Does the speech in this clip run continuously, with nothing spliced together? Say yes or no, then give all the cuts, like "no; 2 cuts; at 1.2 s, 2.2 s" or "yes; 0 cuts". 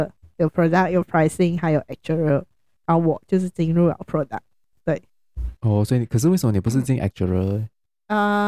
yes; 0 cuts